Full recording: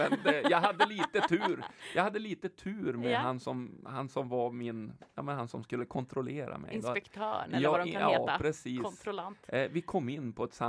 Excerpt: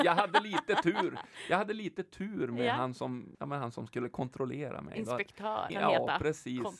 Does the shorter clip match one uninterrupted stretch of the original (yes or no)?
no